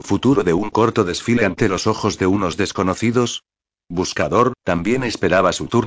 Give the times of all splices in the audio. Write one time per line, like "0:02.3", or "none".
0:04.5